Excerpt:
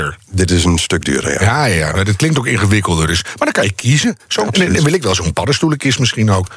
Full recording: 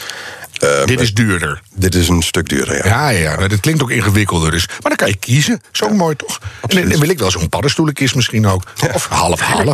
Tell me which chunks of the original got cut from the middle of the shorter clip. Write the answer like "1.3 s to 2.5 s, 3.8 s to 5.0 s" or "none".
5.9 s to 6.6 s